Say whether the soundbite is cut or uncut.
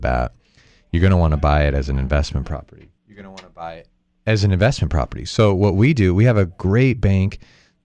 cut